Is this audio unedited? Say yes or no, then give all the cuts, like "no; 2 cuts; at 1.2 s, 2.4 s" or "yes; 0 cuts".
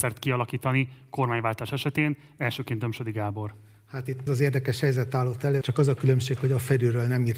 no; 2 cuts; at 4.3 s, 5.6 s